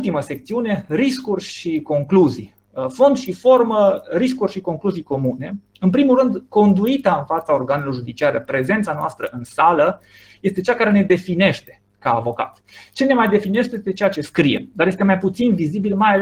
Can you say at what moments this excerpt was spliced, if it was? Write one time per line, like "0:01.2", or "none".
none